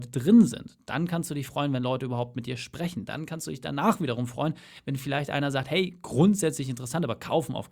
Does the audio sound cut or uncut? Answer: uncut